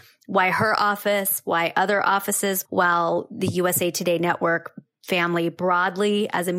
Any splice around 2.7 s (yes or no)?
yes